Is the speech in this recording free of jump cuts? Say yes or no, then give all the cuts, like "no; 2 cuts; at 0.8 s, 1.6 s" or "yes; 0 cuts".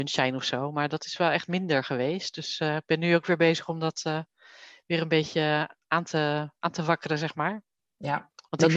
yes; 0 cuts